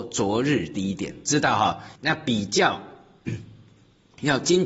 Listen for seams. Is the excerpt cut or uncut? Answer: cut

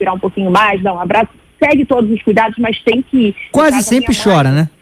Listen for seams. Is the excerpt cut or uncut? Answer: cut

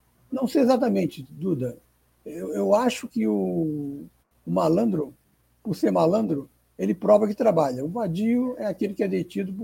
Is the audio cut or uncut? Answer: uncut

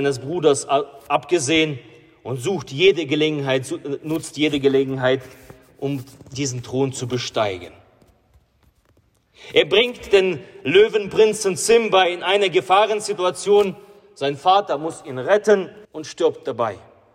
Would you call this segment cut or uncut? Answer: cut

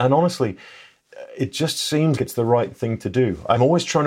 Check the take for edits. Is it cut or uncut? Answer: cut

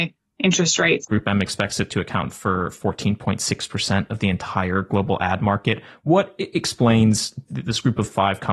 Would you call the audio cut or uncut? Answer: cut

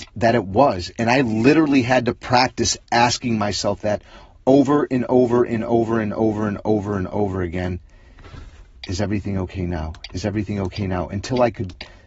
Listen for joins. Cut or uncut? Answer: cut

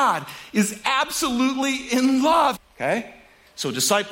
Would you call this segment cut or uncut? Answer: cut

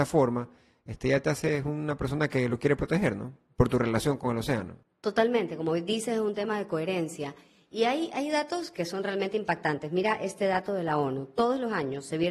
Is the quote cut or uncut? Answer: uncut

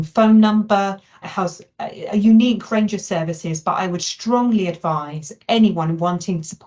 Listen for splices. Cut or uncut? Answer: cut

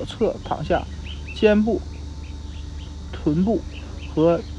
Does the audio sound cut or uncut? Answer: uncut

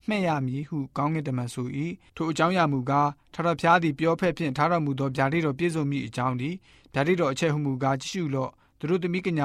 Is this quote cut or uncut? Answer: cut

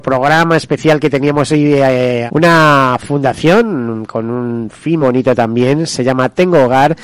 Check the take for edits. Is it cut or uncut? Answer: cut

